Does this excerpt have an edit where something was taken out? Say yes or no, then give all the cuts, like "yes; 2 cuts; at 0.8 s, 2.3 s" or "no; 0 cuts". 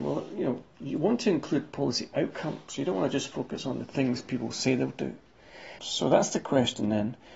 yes; 1 cut; at 5.8 s